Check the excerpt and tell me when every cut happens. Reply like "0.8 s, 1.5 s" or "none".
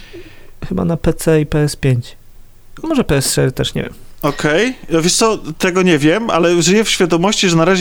none